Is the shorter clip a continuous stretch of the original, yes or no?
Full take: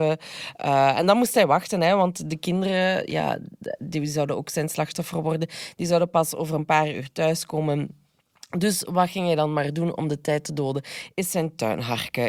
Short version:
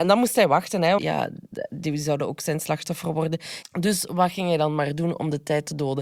no